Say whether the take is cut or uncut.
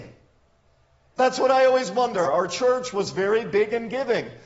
cut